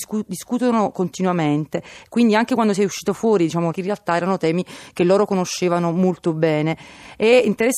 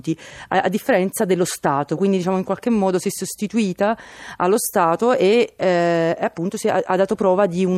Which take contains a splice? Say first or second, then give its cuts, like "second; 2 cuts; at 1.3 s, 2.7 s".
first; 1 cut; at 3.7 s